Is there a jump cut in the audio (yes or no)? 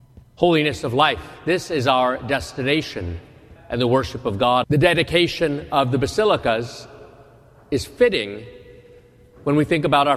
yes